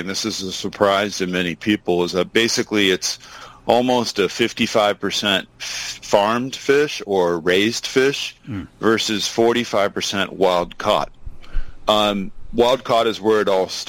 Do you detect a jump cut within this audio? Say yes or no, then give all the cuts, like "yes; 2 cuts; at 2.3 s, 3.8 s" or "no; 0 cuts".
no; 0 cuts